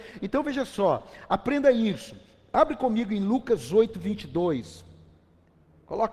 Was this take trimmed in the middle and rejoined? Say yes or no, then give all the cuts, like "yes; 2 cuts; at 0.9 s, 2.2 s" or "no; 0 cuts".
no; 0 cuts